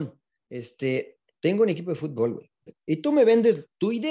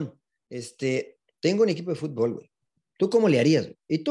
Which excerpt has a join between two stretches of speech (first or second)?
first